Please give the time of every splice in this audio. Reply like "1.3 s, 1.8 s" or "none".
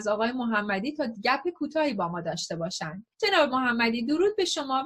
3.1 s